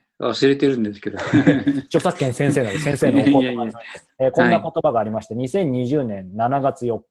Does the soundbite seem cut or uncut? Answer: uncut